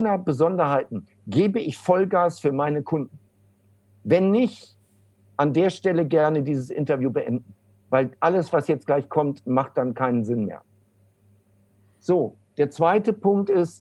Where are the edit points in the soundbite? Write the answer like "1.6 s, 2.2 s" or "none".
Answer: none